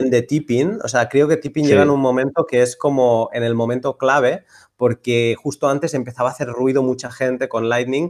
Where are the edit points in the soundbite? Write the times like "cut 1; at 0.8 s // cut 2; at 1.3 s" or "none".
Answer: none